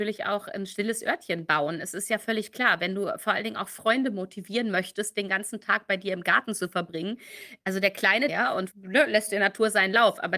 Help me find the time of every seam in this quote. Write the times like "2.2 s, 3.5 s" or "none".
8.3 s